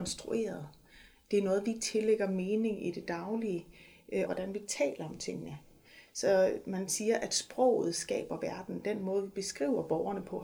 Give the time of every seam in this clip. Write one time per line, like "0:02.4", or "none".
0:04.3